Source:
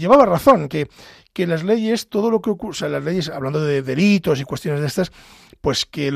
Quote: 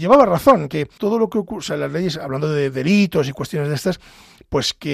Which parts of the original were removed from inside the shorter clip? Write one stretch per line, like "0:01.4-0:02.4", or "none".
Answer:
0:01.0-0:02.1